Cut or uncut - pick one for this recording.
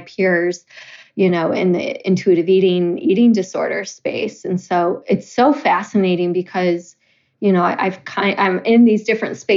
uncut